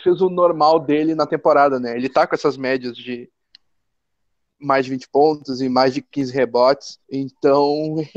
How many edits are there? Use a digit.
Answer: 1